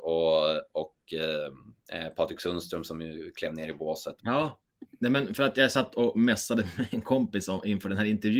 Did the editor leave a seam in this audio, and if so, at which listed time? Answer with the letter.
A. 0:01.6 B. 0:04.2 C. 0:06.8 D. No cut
B